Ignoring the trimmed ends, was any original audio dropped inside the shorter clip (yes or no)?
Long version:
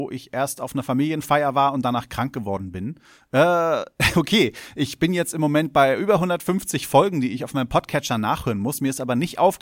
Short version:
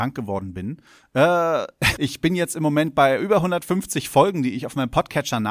yes